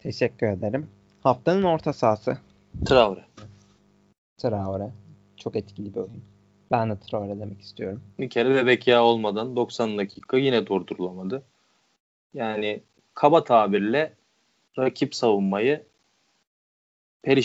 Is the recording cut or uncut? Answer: cut